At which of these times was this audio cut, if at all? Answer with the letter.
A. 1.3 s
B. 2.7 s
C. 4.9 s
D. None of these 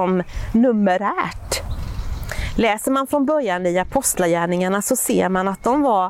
D